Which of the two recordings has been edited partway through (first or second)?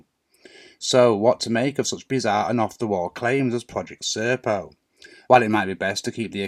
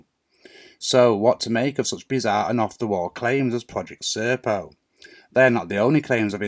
first